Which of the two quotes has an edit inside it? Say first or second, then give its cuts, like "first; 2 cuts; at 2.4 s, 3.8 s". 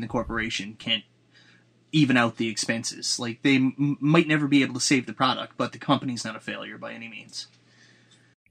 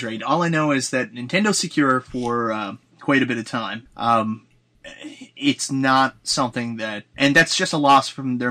second; 2 cuts; at 3.9 s, 7.1 s